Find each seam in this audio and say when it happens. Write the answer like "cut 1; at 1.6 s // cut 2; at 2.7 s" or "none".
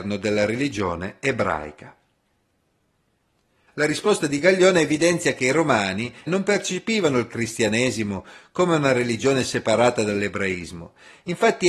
cut 1; at 3.7 s // cut 2; at 6.3 s